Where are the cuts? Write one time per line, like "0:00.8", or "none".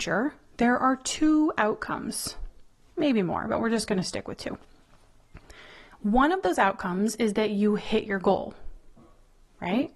none